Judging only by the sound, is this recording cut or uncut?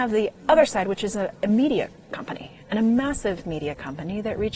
uncut